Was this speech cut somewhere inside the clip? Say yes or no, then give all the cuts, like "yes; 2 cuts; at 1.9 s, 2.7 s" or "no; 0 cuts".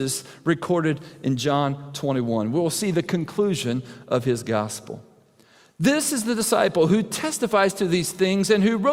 no; 0 cuts